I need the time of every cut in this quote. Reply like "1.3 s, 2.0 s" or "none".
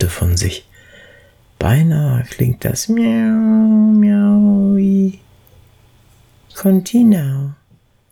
none